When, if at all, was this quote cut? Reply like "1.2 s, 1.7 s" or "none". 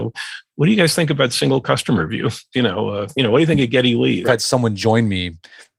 2.5 s, 4.2 s